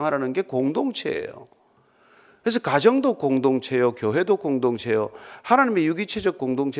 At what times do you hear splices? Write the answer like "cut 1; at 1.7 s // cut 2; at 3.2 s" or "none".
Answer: none